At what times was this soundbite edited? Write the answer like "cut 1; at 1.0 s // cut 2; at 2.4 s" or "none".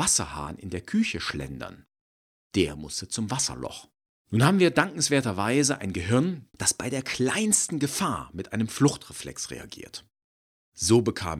cut 1; at 4.2 s // cut 2; at 6.5 s